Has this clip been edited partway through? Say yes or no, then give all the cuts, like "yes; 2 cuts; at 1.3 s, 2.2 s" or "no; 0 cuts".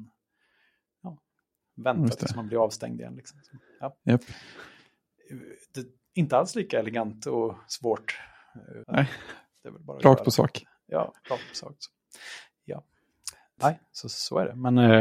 yes; 2 cuts; at 8.8 s, 13.6 s